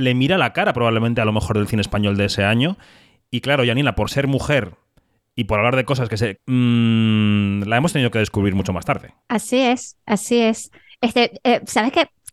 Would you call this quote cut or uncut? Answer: cut